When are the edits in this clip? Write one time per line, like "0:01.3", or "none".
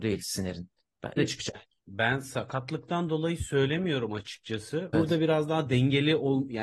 0:01.2
0:04.9